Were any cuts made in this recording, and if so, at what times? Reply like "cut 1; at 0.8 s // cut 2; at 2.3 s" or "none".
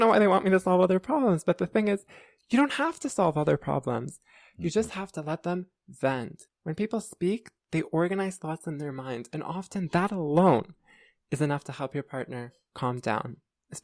cut 1; at 6.5 s